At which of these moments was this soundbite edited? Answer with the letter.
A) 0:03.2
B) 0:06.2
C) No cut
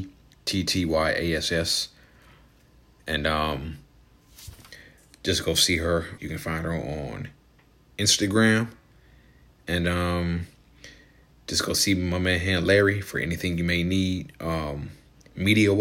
B